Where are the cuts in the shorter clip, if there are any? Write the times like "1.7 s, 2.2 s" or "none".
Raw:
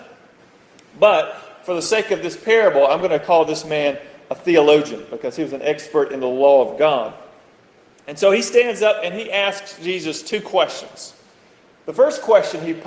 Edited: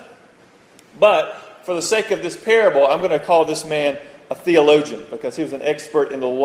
none

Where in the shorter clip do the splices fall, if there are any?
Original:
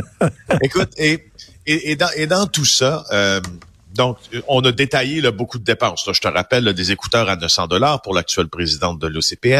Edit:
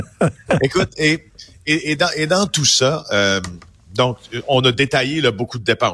none

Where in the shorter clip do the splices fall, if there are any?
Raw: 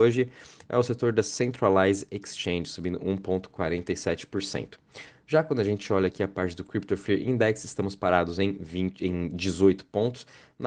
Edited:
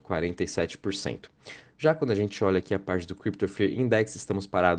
none

